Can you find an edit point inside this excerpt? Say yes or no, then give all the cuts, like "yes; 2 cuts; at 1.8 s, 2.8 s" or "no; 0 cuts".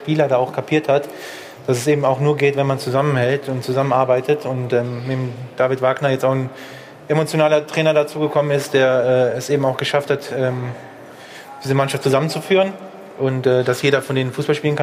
no; 0 cuts